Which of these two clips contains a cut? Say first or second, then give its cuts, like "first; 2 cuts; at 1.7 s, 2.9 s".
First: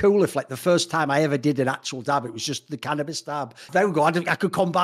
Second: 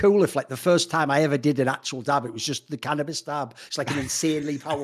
first; 1 cut; at 3.7 s